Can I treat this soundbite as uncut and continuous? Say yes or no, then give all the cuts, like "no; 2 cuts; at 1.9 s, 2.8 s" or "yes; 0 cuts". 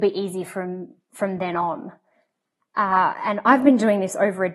yes; 0 cuts